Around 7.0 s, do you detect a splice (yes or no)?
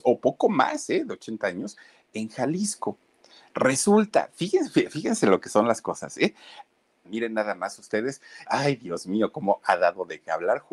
yes